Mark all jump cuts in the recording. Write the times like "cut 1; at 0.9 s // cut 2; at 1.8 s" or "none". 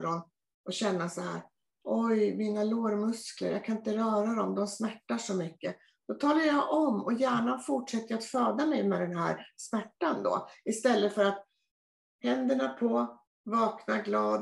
cut 1; at 13.3 s